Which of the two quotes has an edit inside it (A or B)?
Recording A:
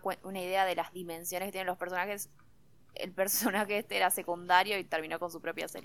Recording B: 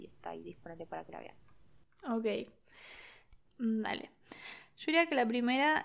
B